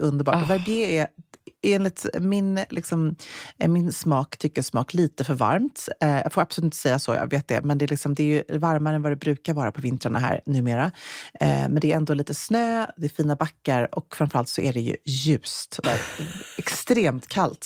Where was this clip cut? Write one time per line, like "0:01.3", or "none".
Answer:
0:15.8